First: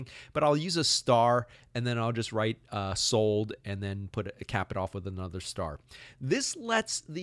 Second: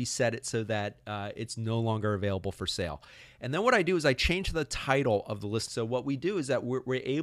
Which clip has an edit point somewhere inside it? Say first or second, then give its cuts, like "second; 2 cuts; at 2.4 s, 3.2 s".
second; 1 cut; at 5.7 s